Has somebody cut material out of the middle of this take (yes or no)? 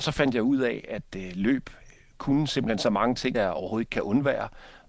yes